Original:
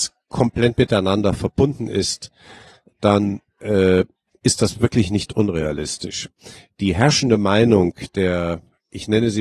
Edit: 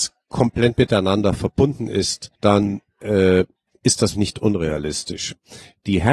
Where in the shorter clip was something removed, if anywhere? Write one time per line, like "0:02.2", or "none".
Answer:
0:02.4
0:04.1